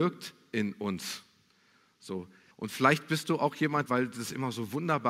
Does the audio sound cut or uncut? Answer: cut